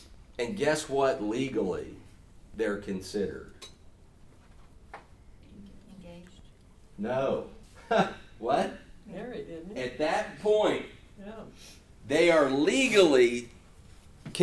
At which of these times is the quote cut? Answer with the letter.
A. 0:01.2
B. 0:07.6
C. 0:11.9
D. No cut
B